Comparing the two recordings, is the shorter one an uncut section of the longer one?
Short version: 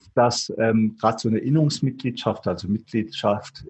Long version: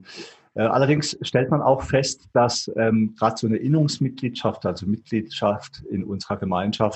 yes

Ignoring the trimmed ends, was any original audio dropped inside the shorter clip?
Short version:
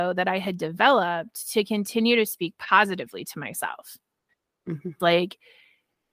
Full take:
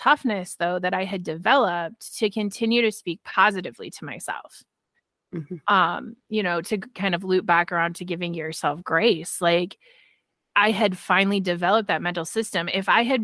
yes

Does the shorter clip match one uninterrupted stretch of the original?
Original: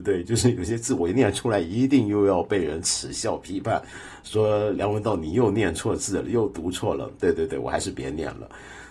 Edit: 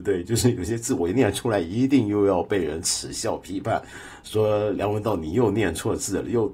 yes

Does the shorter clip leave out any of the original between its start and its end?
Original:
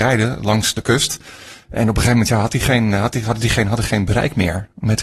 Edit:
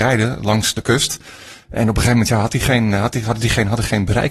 no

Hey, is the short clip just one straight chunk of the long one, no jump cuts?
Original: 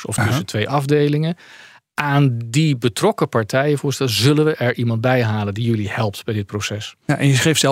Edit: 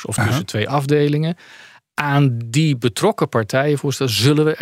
yes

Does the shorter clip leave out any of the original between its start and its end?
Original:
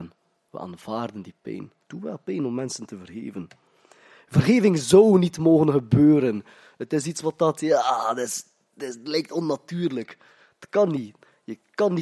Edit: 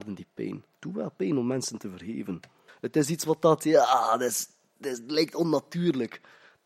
yes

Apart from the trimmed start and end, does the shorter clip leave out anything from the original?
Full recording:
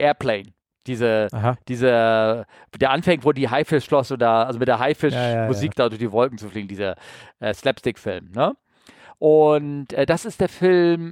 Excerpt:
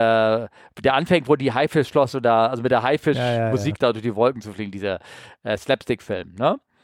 no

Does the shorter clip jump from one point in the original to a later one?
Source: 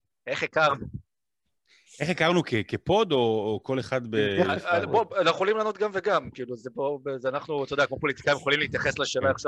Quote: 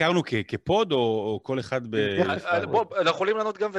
no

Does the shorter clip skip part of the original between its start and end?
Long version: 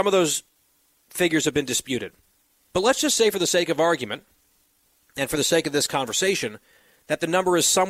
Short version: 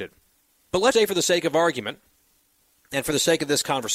yes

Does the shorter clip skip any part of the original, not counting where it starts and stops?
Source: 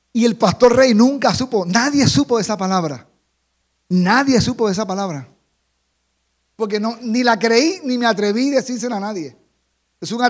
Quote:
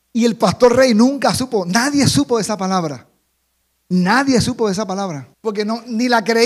yes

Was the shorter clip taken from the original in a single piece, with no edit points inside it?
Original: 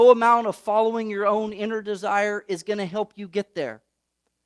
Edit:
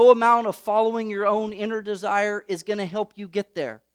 yes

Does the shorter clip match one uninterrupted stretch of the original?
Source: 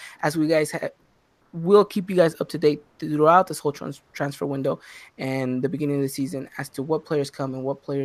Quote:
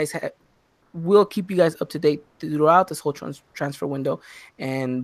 yes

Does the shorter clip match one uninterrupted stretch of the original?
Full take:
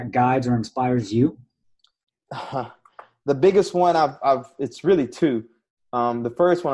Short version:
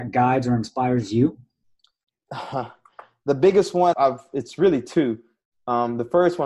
no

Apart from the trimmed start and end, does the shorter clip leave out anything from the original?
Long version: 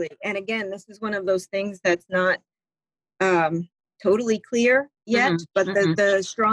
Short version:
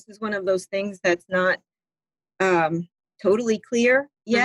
no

